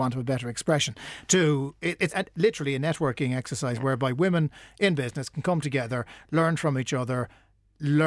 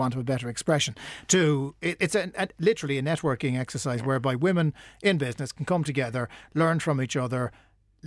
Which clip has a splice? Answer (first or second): first